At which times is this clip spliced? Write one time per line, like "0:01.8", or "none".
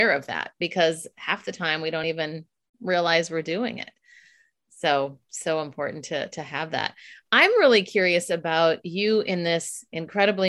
none